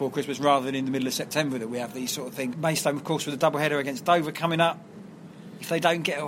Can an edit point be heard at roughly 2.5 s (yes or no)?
yes